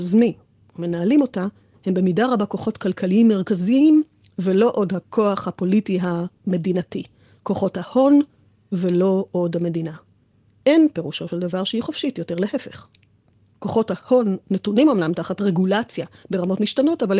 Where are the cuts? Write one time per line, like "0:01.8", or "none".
none